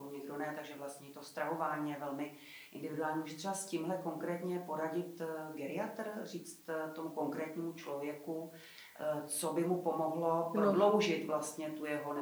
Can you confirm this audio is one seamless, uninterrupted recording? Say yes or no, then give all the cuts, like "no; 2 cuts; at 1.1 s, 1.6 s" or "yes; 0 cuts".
yes; 0 cuts